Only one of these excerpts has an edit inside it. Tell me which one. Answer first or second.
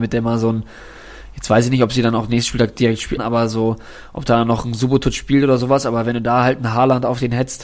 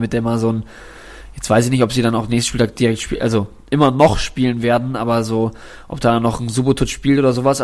first